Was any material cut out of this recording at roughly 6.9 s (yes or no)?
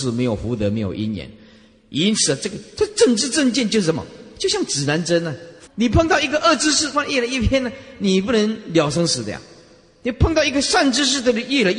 yes